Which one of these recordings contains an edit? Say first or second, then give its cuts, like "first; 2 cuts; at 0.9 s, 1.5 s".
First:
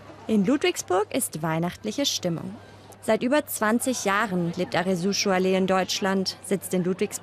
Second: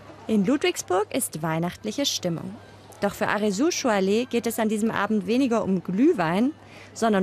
first; 1 cut; at 2.9 s